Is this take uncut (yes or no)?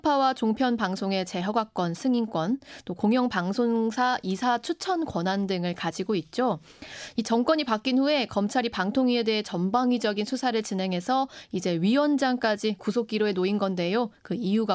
yes